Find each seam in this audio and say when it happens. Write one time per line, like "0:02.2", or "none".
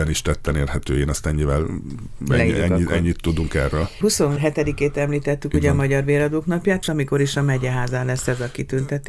0:02.5
0:06.8